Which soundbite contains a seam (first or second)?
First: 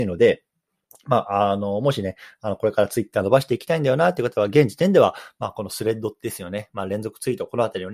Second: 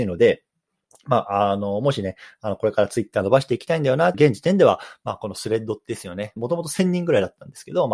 second